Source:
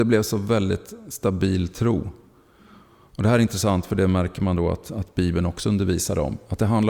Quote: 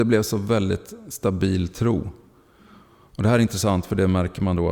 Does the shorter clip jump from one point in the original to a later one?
no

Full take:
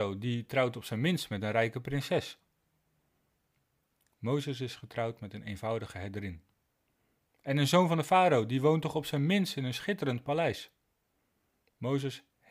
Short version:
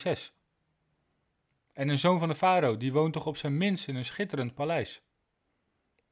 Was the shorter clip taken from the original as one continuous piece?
no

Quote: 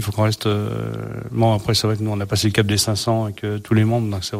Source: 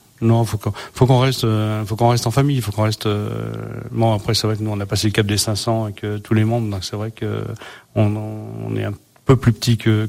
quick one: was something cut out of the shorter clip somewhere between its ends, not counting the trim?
no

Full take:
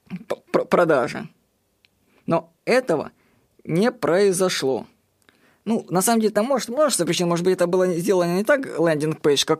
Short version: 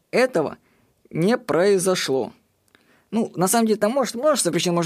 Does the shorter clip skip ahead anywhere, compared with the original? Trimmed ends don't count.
no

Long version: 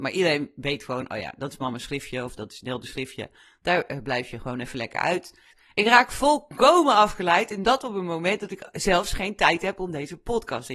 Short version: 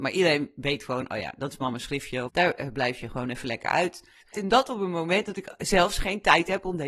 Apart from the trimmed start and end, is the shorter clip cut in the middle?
yes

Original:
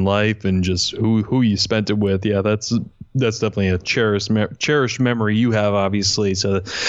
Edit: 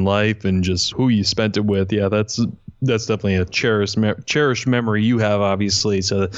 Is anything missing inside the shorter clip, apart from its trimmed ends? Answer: yes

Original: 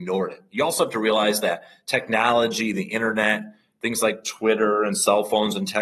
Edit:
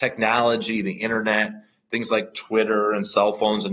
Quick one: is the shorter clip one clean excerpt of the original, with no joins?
yes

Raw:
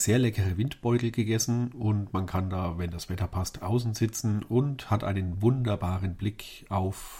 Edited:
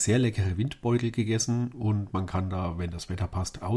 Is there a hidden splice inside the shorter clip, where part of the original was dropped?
no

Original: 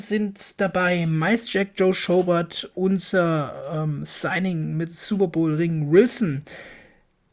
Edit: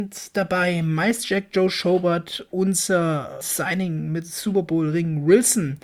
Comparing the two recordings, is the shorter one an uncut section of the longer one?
no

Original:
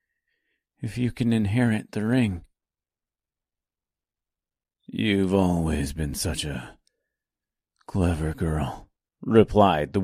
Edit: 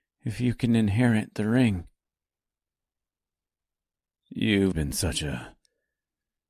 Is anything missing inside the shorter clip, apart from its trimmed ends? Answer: yes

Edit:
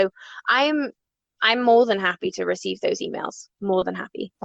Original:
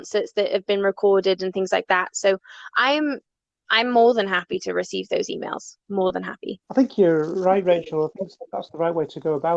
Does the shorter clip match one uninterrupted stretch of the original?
yes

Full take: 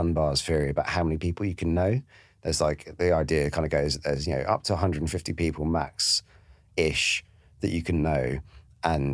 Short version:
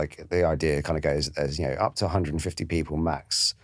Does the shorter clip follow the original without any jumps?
yes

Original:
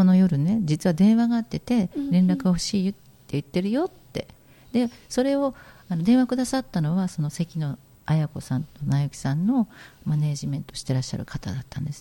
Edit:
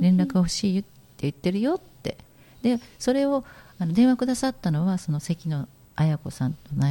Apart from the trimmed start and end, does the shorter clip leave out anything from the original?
no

